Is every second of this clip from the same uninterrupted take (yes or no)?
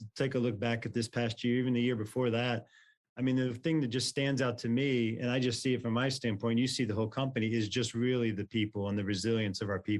yes